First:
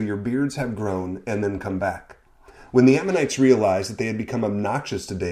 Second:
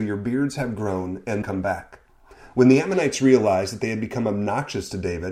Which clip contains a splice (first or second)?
second